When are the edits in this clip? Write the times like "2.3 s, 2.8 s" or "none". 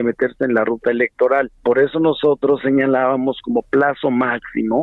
1.6 s